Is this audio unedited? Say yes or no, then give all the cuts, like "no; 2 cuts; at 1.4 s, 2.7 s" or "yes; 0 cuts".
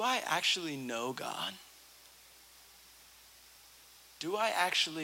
yes; 0 cuts